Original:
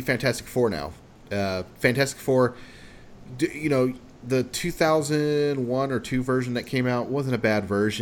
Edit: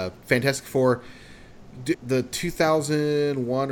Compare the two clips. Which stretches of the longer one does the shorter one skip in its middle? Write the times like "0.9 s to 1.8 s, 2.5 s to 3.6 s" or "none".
3.5 s to 4.2 s